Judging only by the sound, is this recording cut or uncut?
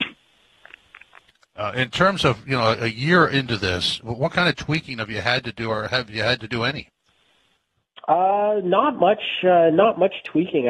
uncut